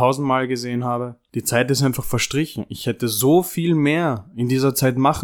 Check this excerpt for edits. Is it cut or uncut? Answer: uncut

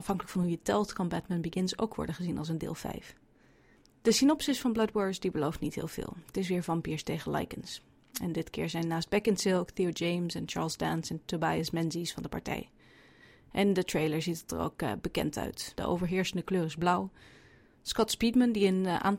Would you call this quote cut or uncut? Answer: cut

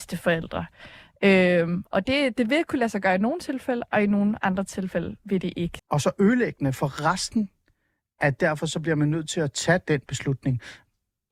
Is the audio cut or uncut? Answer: cut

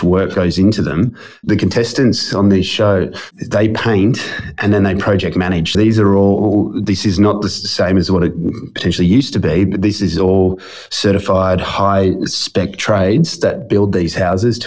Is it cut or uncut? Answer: cut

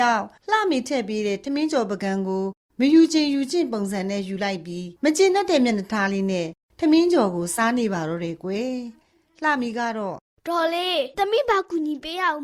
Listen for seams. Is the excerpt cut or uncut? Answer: cut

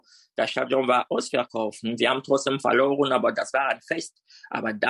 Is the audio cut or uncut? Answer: uncut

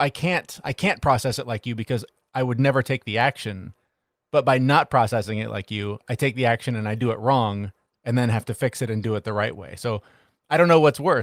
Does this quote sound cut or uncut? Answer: uncut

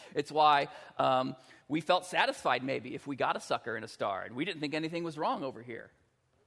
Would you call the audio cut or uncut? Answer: uncut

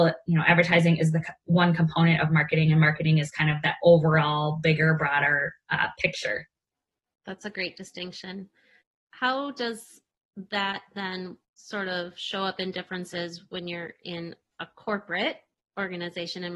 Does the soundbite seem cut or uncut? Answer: uncut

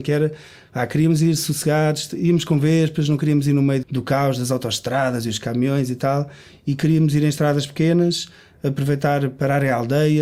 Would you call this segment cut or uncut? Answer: cut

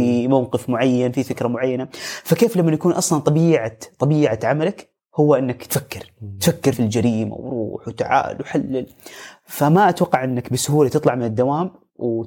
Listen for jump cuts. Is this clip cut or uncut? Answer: cut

